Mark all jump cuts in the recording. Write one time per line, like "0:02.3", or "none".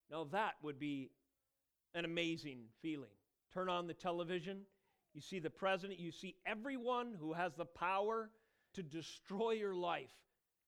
0:08.7